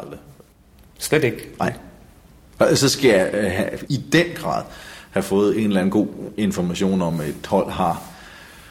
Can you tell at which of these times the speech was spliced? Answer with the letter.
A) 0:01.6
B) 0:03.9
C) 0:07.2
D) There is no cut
B